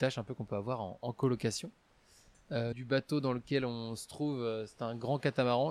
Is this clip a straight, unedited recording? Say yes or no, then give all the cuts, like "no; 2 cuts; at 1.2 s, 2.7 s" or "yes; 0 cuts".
no; 1 cut; at 2.7 s